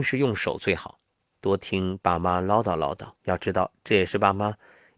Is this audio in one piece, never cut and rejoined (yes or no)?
no